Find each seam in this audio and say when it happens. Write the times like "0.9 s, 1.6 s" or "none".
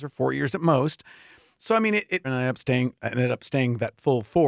2.2 s